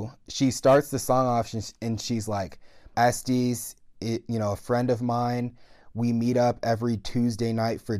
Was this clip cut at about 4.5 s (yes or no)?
no